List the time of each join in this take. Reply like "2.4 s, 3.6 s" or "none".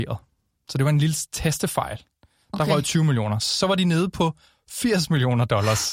none